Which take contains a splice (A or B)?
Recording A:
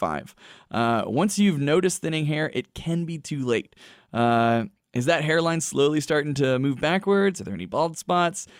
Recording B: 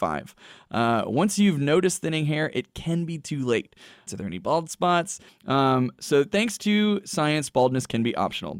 B